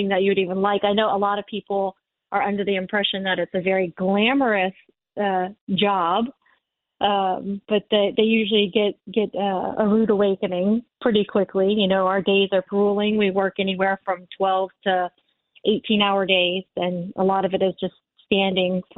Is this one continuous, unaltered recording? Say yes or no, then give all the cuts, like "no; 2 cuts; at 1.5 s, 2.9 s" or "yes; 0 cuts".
no; 1 cut; at 12.7 s